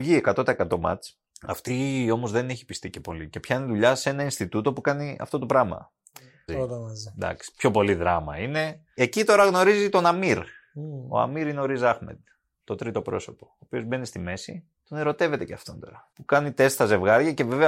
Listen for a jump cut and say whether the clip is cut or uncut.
cut